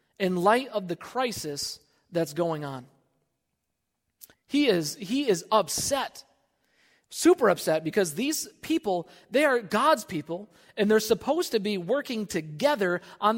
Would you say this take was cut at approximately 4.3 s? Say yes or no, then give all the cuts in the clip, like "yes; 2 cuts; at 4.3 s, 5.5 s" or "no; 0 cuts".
yes; 1 cut; at 4.3 s